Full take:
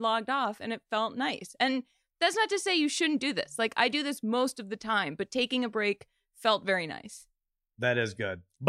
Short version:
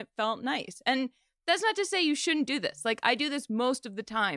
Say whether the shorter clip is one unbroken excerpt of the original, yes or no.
yes